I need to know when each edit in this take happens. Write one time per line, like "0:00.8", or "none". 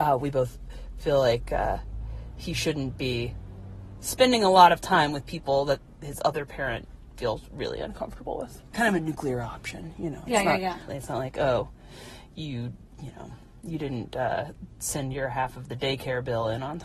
0:08.7
0:10.9